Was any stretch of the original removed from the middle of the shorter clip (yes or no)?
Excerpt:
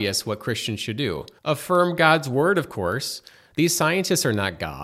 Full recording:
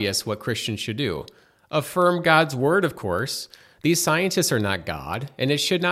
yes